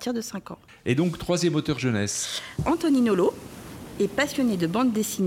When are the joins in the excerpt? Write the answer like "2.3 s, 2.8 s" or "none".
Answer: 2.6 s